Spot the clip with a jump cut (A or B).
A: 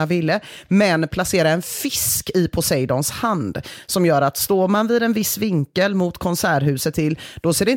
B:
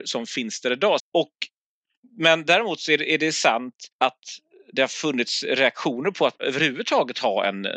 B